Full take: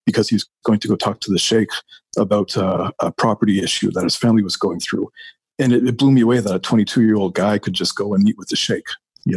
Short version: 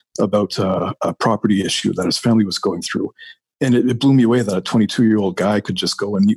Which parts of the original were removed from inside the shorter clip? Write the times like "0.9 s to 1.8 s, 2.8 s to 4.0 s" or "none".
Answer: none